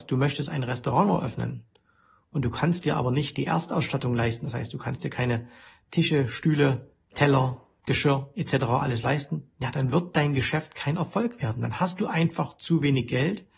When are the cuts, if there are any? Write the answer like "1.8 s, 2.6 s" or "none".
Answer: none